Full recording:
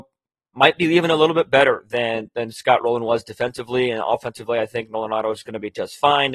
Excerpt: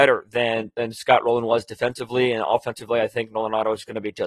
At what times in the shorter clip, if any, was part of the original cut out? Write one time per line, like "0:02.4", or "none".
none